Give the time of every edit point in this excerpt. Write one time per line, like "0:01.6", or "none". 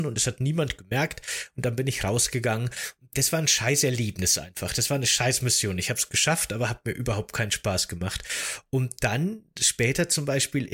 none